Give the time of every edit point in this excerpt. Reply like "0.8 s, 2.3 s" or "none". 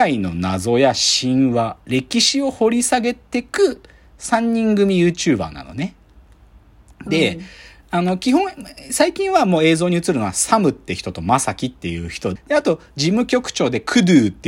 12.4 s